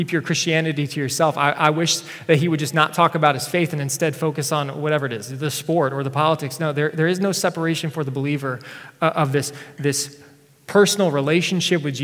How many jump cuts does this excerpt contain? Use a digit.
0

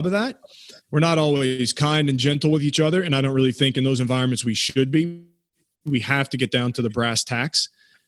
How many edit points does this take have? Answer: 0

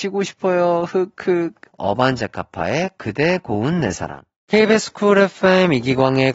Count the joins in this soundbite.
1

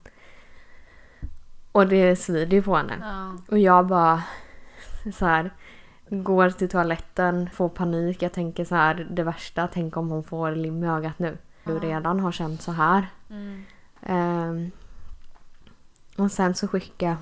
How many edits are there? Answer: 2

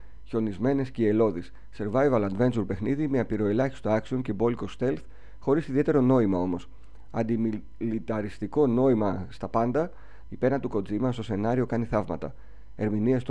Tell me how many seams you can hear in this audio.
1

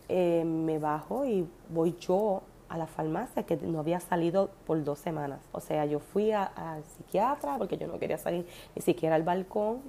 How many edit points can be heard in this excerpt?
2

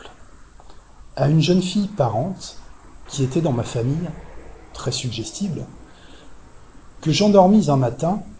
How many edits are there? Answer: 1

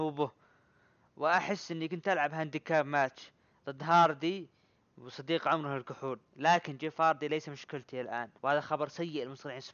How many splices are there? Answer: 2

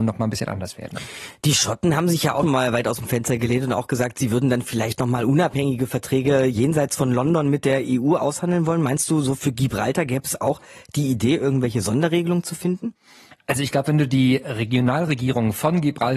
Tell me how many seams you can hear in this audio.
1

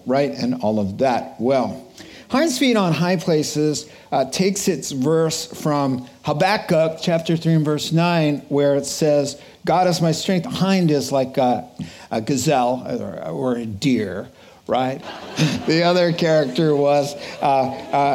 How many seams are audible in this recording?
2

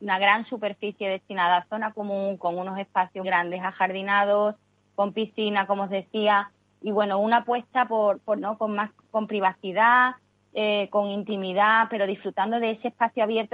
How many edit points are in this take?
2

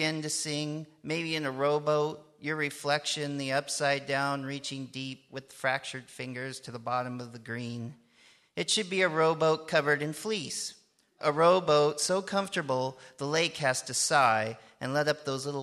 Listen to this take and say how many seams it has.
0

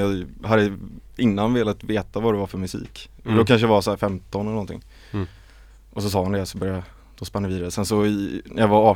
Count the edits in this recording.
0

